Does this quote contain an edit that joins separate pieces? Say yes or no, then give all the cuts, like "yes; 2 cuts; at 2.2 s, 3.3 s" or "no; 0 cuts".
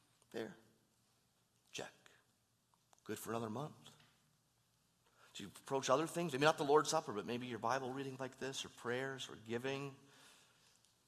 no; 0 cuts